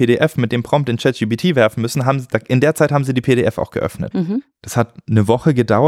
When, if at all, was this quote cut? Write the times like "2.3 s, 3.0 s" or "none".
4.1 s